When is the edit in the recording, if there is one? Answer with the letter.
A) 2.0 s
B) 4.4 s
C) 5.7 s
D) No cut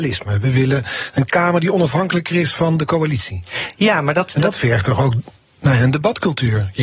D